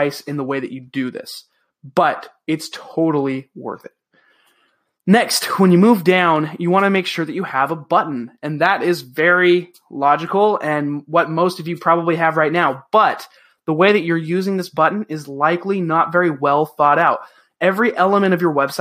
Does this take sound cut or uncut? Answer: uncut